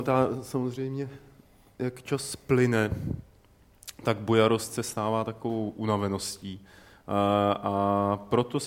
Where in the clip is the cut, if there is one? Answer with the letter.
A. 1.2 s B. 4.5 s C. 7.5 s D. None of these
D